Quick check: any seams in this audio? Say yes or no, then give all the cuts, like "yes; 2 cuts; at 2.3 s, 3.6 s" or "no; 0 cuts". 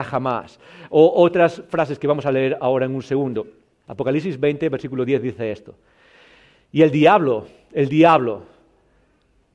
yes; 1 cut; at 3.8 s